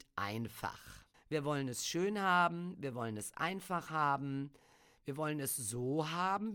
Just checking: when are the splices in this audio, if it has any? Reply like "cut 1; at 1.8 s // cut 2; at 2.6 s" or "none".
cut 1; at 1.1 s